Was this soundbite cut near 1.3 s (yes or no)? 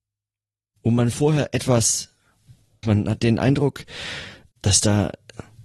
no